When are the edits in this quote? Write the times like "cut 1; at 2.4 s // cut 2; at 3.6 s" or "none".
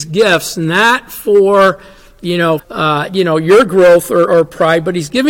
cut 1; at 2.6 s // cut 2; at 4.3 s